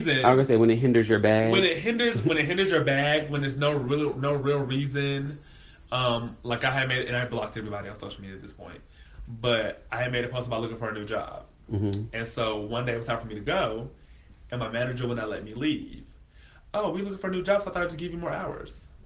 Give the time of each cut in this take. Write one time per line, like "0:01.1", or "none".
none